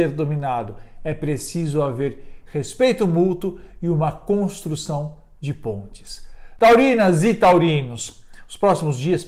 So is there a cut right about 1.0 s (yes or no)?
no